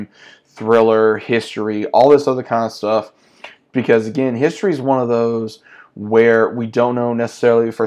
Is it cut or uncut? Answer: uncut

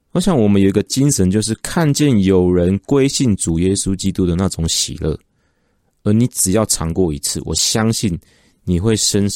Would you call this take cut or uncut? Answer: uncut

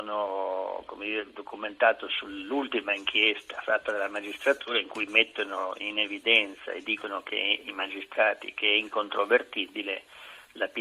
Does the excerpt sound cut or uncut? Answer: uncut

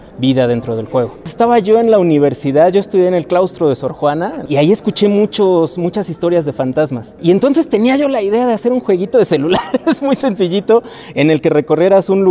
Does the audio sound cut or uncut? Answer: uncut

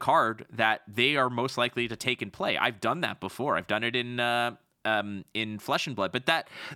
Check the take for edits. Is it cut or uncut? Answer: uncut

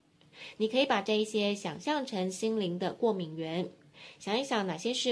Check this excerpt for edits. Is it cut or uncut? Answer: uncut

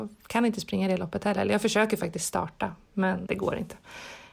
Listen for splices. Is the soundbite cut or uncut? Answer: cut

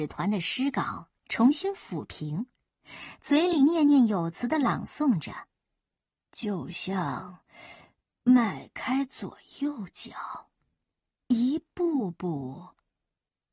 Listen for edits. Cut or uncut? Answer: uncut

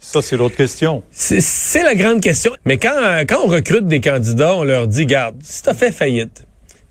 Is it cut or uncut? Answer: cut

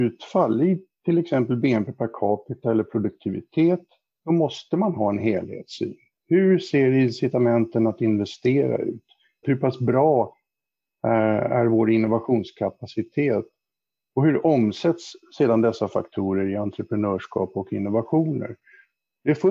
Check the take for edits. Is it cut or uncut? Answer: cut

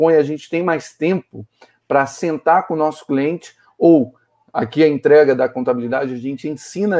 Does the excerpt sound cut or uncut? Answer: uncut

